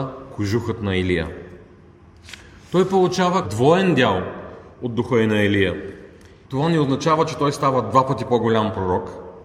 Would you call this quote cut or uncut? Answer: cut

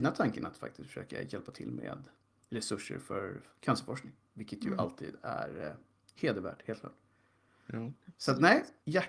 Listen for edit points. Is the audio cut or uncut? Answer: uncut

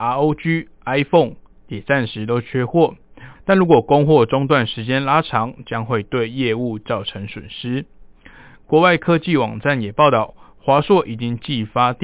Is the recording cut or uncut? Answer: cut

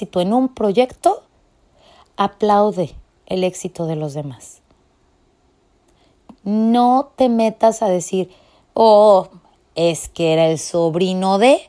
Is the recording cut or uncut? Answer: uncut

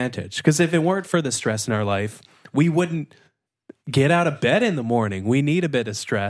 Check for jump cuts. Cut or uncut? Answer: uncut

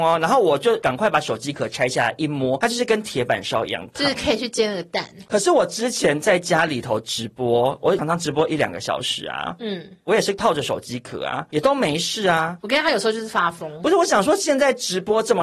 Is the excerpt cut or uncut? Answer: cut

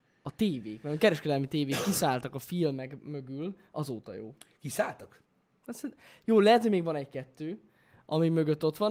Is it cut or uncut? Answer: uncut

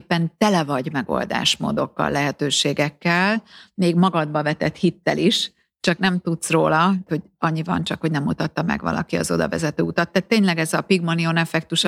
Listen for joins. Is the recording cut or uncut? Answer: cut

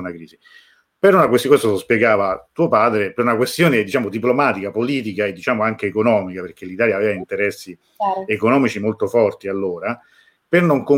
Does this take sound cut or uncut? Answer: uncut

